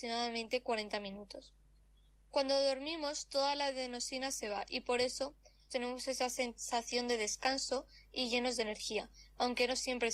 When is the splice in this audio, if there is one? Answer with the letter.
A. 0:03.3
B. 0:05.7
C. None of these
B